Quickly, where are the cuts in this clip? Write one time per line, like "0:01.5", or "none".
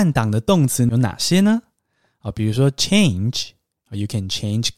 none